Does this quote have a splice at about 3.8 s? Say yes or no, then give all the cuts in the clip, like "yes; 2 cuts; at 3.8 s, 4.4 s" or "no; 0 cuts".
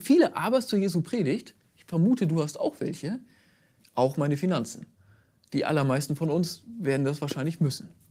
yes; 1 cut; at 3.8 s